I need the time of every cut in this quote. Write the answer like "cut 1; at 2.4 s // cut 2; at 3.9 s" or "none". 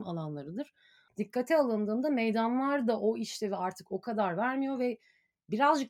cut 1; at 1.1 s